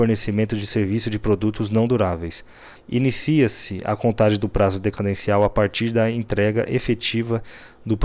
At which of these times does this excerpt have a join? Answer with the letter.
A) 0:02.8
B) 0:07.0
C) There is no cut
A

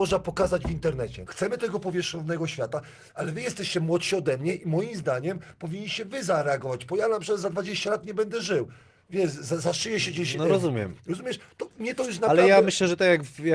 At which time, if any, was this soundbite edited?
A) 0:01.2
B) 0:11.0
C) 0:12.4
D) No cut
A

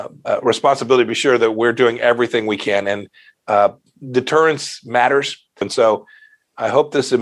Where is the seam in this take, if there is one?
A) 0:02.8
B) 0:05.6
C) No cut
B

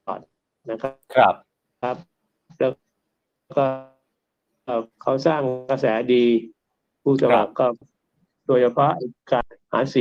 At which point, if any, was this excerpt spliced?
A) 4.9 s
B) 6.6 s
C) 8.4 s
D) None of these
A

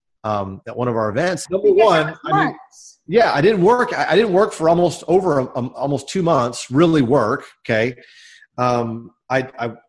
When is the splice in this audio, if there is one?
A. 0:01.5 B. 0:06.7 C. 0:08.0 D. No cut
A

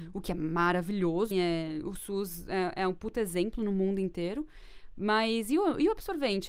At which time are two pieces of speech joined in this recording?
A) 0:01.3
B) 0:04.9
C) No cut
A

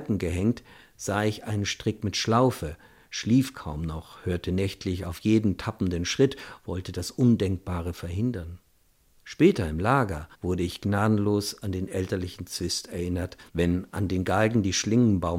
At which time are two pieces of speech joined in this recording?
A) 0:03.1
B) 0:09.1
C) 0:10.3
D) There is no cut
C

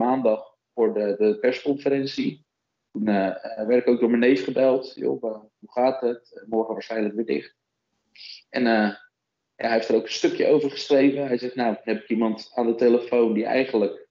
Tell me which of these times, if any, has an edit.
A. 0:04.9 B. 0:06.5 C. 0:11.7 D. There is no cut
D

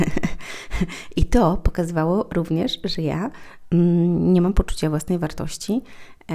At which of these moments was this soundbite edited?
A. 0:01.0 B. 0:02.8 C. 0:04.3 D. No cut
D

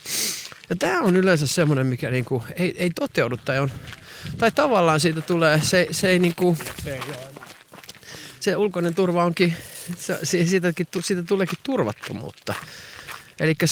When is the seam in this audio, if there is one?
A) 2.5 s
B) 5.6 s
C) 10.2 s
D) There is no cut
D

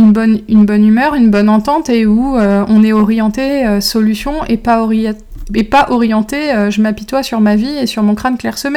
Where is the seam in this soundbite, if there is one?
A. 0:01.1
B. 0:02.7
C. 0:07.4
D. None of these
D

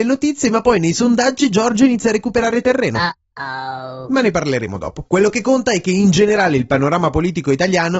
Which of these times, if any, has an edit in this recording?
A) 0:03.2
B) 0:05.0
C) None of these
C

